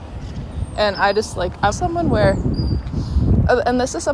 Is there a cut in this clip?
yes; 1 cut; at 1.7 s

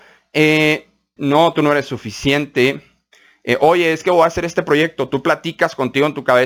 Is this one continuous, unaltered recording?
no; 1 cut; at 1.2 s

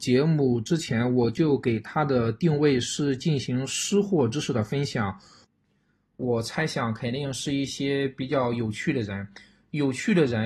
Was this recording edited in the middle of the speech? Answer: yes; 1 cut; at 6.1 s

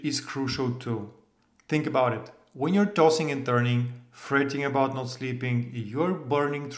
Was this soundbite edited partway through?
no; 0 cuts

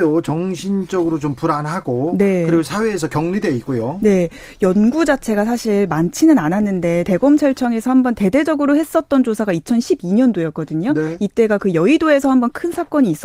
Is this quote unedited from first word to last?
yes; 0 cuts

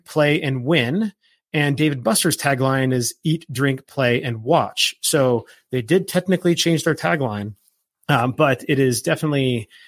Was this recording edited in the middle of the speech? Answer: no; 0 cuts

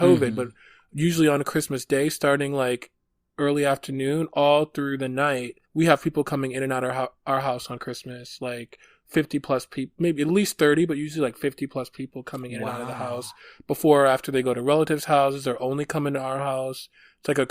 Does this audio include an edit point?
yes; 1 cut; at 5.6 s

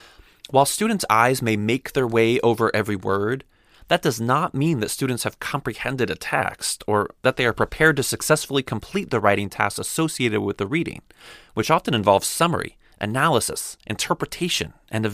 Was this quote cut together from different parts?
no; 0 cuts

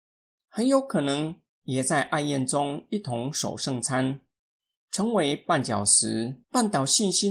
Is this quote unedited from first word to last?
no; 1 cut; at 4.8 s

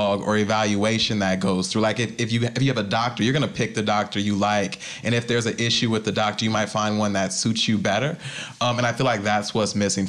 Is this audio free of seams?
yes; 0 cuts

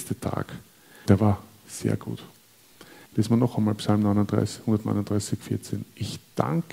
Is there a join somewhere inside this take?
yes; 2 cuts; at 1.1 s, 3.1 s

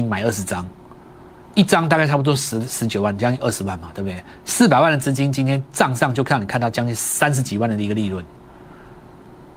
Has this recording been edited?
no; 0 cuts

